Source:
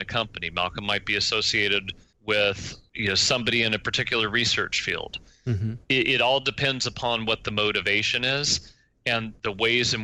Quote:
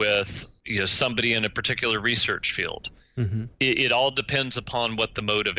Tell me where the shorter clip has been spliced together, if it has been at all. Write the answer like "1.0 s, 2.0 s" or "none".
none